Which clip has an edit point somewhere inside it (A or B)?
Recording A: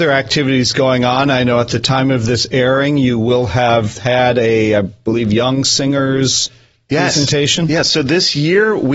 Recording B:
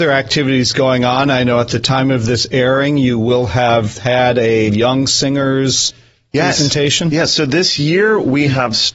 B